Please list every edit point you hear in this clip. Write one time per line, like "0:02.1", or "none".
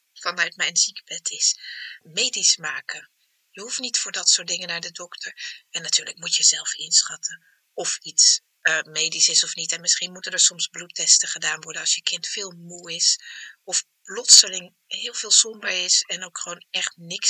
0:02.0